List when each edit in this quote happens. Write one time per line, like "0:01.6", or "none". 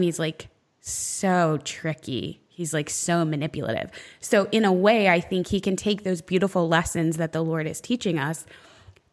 none